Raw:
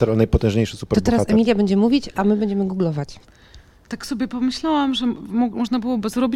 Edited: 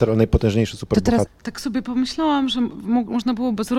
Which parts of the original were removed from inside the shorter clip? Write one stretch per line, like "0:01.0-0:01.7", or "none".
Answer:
0:01.3-0:03.7